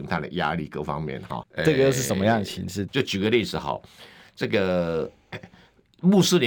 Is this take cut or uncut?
cut